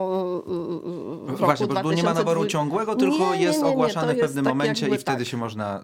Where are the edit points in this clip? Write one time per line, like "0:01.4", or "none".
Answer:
none